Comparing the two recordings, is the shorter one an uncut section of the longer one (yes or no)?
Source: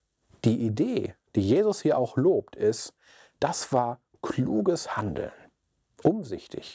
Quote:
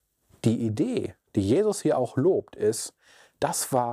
yes